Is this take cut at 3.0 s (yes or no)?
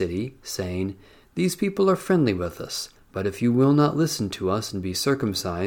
yes